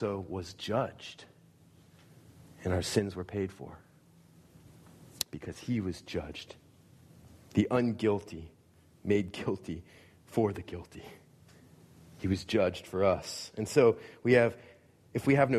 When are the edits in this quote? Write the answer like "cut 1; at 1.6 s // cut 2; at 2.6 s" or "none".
none